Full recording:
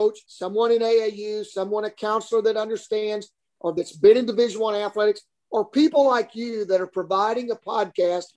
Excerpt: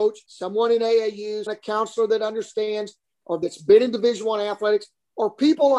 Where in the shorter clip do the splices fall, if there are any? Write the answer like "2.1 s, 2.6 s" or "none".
1.5 s